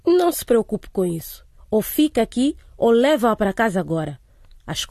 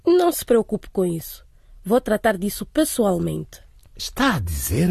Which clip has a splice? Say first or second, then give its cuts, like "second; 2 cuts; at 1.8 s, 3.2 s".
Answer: first; 1 cut; at 1.6 s